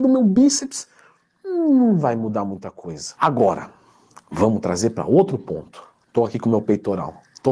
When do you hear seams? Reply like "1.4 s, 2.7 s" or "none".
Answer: none